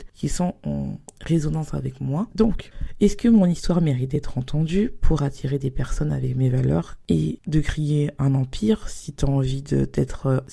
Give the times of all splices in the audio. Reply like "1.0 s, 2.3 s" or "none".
2.3 s